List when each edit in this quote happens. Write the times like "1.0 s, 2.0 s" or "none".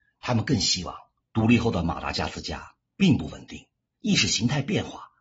1.2 s, 3.9 s